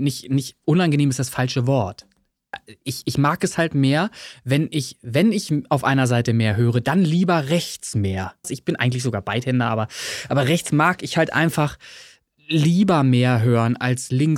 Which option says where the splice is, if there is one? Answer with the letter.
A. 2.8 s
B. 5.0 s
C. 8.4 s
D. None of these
C